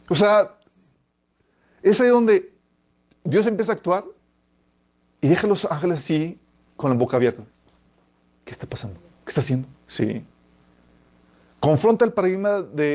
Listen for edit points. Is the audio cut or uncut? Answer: cut